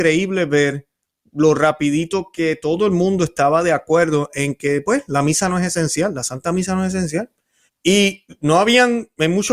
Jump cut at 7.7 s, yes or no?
yes